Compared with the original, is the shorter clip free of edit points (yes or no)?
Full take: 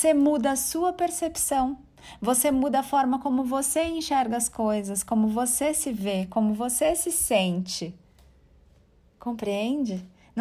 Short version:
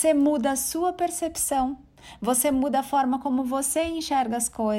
yes